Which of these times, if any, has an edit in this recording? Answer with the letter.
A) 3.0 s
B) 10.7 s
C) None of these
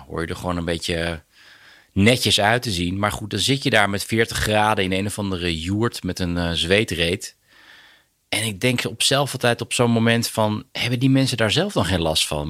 B